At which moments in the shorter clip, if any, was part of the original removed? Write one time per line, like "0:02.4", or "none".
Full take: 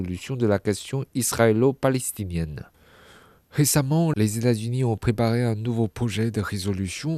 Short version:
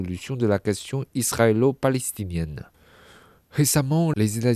none